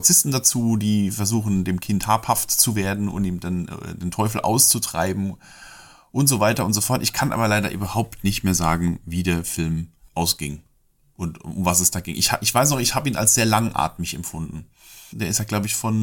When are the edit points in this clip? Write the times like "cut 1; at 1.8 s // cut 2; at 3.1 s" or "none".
cut 1; at 15.1 s